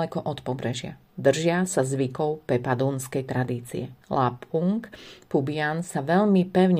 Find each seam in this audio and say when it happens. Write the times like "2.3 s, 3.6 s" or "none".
none